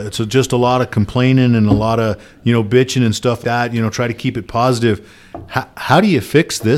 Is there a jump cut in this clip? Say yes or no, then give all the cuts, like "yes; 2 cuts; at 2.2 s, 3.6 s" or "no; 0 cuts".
yes; 1 cut; at 3.4 s